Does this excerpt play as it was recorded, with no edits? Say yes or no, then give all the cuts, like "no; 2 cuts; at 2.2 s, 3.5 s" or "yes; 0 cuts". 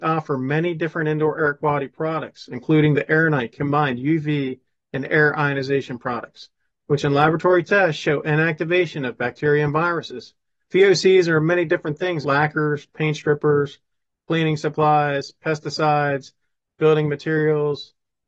no; 2 cuts; at 10.6 s, 12.2 s